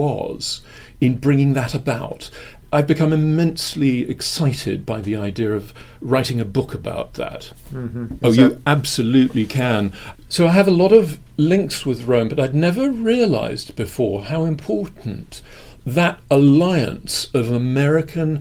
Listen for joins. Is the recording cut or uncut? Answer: cut